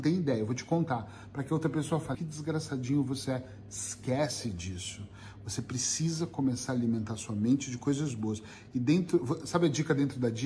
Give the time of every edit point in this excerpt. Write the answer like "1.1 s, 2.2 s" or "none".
2.1 s